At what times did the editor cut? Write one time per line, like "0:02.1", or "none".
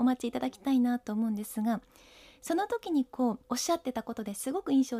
0:03.4